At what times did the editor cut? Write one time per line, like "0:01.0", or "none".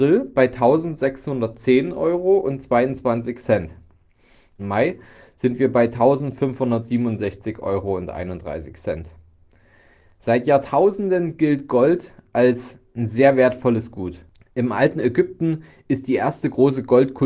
0:04.6